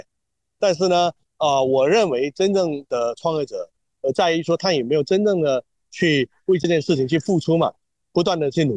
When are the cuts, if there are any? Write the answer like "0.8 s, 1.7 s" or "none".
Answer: 3.9 s